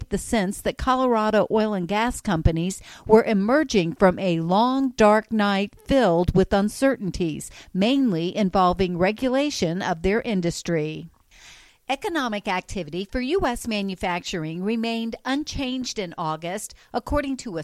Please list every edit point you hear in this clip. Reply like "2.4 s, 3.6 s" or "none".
none